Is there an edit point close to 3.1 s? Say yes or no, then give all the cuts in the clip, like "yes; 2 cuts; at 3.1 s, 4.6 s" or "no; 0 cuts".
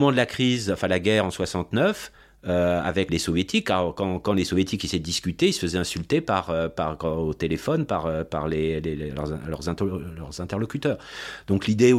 yes; 1 cut; at 3.1 s